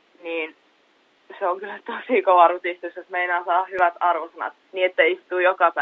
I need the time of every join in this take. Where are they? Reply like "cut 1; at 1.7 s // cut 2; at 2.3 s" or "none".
cut 1; at 4.6 s